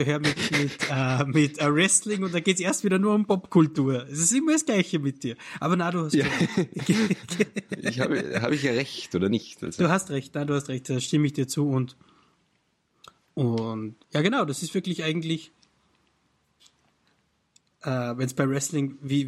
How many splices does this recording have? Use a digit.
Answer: 1